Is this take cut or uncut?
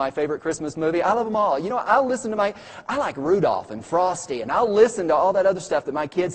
uncut